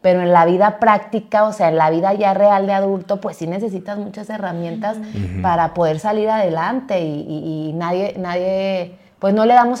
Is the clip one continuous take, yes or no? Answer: yes